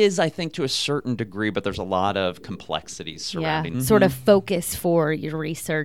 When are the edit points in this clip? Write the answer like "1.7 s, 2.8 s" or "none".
3.7 s